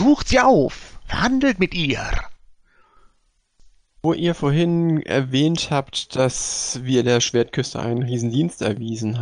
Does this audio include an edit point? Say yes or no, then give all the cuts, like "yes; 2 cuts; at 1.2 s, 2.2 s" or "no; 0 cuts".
no; 0 cuts